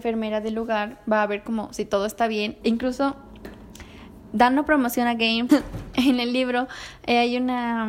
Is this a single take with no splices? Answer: no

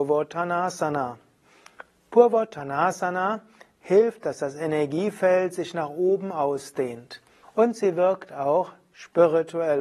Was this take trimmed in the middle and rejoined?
yes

